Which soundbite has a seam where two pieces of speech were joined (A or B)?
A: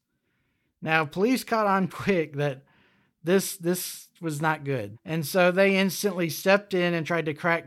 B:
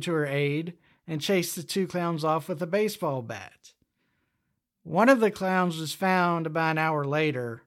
A